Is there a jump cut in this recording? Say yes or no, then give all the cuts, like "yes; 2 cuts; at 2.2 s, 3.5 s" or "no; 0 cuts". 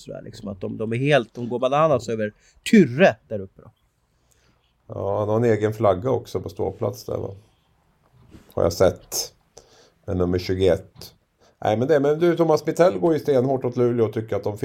no; 0 cuts